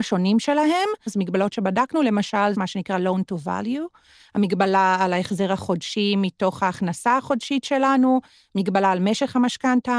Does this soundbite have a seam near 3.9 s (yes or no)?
no